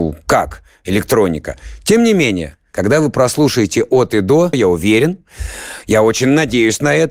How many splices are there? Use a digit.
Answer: 1